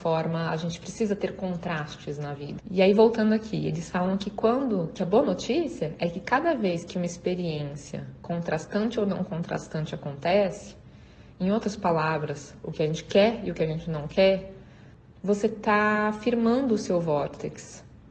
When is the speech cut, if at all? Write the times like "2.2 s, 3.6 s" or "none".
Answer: 2.6 s